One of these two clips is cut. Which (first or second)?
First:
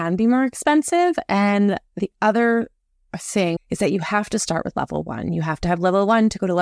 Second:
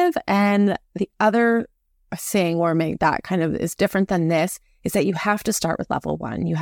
first